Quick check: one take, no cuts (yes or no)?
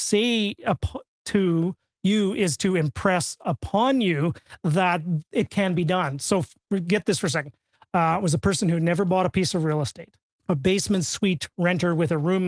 no